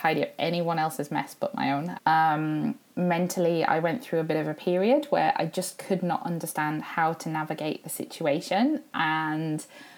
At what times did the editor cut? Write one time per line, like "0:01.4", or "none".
0:02.0